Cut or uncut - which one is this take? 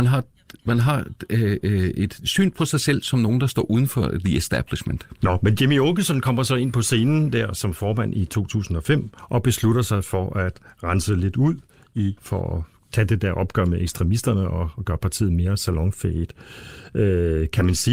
cut